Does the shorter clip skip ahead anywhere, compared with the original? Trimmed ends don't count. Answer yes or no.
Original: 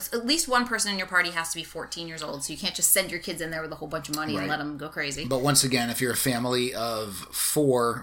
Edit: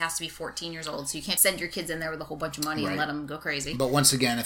yes